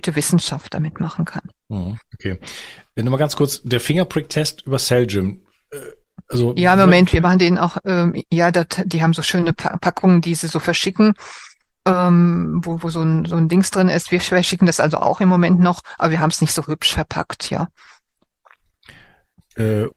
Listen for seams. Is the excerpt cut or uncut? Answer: uncut